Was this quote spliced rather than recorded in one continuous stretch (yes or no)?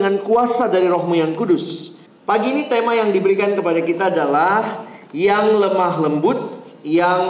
yes